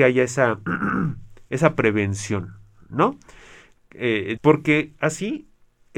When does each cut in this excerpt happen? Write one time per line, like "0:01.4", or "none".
0:04.4